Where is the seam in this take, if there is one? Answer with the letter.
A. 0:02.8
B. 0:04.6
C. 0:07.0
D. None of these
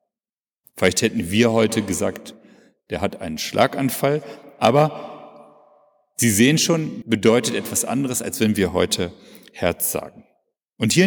C